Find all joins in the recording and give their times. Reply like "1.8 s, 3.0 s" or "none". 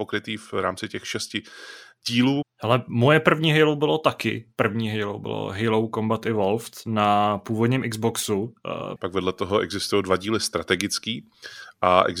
2.4 s, 9.0 s